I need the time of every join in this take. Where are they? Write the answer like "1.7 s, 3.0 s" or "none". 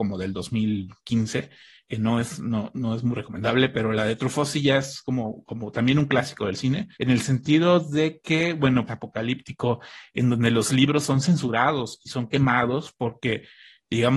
6.9 s, 8.9 s